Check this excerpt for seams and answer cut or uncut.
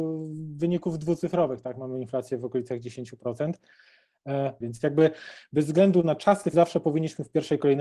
cut